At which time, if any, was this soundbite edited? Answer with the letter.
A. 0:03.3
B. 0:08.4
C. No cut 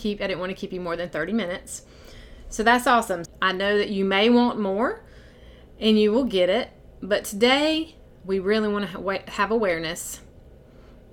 A